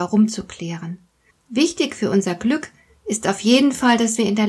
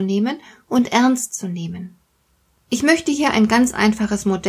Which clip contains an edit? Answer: first; 1 cut; at 1.3 s

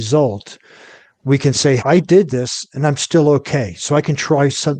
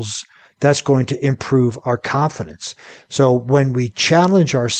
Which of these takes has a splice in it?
first; 1 cut; at 1.8 s

